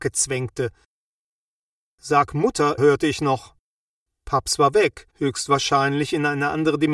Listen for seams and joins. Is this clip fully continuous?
no; 2 cuts; at 2.8 s, 5.1 s

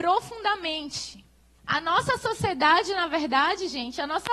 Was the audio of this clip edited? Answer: yes; 1 cut; at 1.6 s

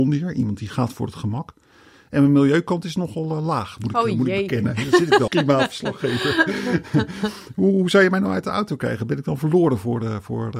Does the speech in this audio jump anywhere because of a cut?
yes; 1 cut; at 5.3 s

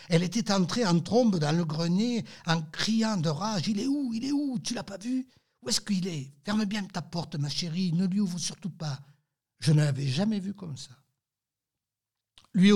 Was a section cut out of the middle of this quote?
yes; 1 cut; at 9.4 s

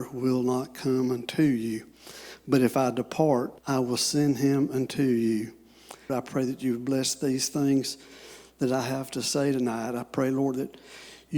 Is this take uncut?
no; 2 cuts; at 3.6 s, 6.1 s

